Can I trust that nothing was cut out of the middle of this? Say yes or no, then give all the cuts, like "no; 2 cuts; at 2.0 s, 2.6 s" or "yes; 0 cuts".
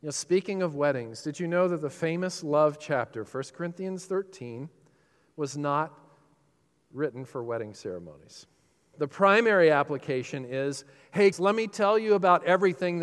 no; 2 cuts; at 8.9 s, 11.3 s